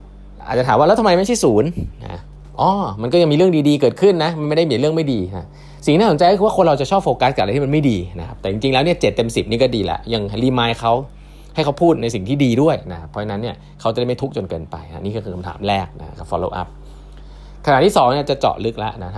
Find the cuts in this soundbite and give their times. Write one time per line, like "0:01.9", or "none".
none